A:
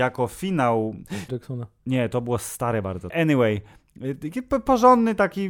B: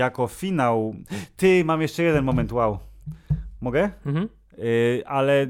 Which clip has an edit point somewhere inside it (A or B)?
A